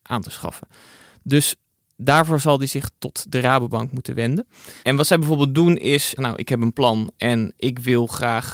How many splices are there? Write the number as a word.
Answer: two